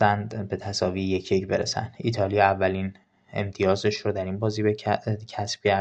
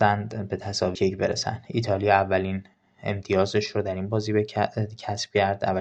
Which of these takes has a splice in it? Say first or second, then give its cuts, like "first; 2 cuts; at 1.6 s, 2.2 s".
second; 1 cut; at 1.0 s